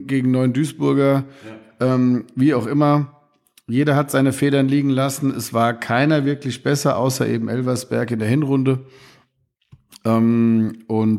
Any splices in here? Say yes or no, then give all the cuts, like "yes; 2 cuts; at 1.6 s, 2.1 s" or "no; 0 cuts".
no; 0 cuts